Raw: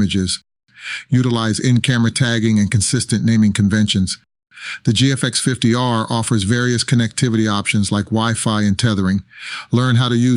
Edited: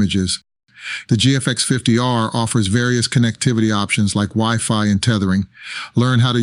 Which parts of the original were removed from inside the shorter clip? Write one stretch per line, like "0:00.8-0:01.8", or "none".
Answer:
0:01.1-0:04.8